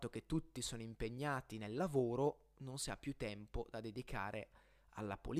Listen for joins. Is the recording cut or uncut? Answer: uncut